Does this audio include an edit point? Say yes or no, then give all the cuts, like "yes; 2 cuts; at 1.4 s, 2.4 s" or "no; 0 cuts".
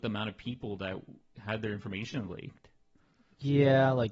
no; 0 cuts